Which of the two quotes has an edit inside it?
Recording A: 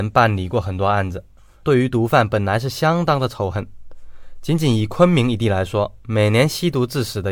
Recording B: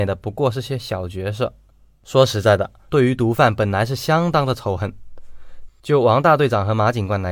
B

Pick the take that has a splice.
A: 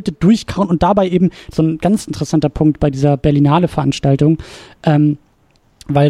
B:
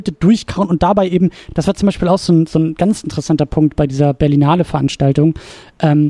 A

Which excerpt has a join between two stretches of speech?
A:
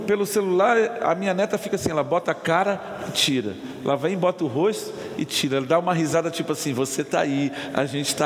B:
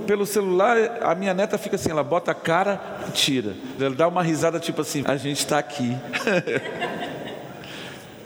B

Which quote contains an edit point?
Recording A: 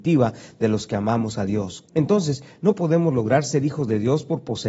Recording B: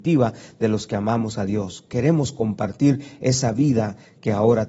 A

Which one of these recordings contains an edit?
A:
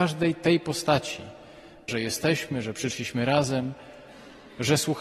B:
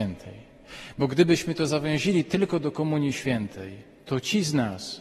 A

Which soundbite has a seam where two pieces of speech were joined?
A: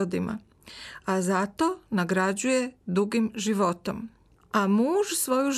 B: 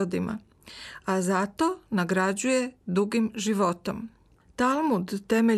B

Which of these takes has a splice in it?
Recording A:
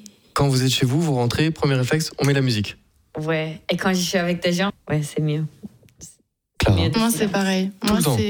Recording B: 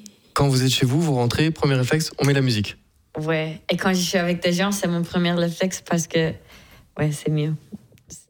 A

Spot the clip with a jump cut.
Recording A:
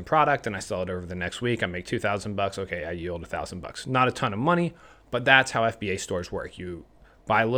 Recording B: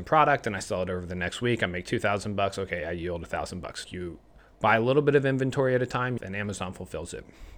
B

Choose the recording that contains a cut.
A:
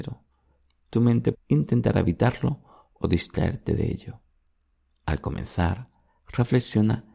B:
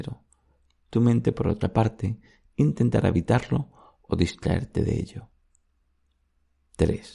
A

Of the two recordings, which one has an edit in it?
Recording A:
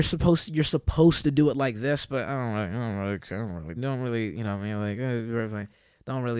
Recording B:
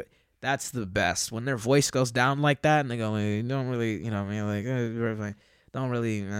A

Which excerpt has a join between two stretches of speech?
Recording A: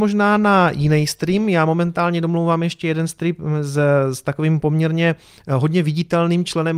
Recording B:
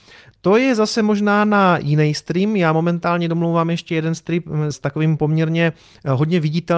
B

